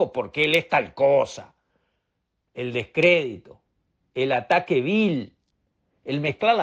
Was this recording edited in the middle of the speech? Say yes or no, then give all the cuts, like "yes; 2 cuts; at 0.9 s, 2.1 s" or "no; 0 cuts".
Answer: no; 0 cuts